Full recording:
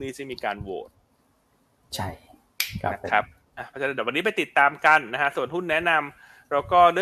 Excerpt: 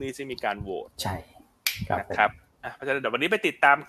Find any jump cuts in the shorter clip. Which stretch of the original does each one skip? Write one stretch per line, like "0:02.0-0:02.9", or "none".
0:00.9-0:01.9